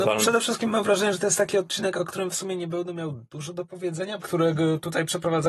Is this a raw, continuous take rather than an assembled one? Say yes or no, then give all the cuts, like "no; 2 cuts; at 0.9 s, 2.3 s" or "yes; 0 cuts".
no; 1 cut; at 4.2 s